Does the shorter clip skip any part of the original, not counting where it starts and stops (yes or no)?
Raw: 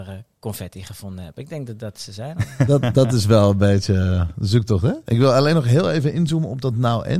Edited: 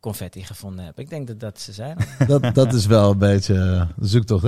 no